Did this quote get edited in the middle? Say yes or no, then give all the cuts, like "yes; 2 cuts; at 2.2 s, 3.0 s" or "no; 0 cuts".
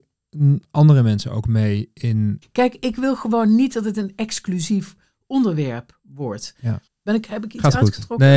yes; 2 cuts; at 2.4 s, 6.9 s